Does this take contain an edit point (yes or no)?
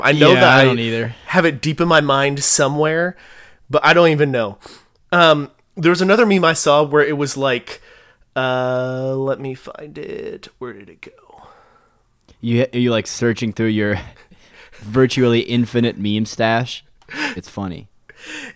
yes